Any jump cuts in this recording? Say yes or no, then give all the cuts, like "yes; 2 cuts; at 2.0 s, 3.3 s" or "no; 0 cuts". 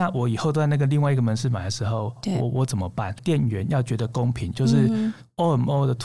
yes; 2 cuts; at 3.2 s, 4.5 s